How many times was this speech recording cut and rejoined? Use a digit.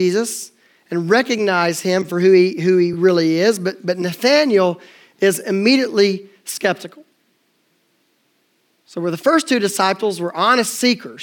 0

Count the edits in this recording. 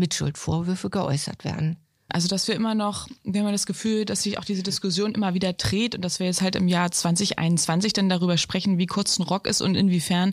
1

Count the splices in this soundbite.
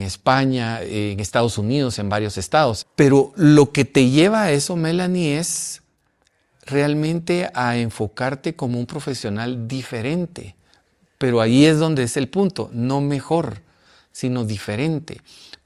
1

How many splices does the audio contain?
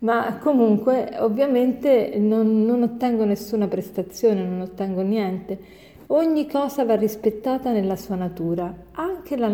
0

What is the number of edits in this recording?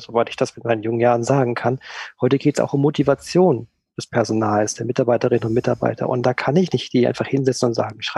0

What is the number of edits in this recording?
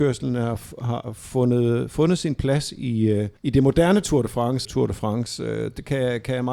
2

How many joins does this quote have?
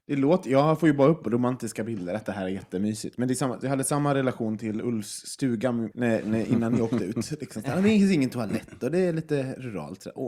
1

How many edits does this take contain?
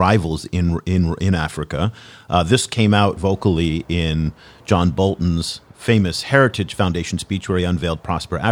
1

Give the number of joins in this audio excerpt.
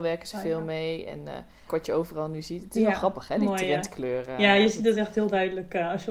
1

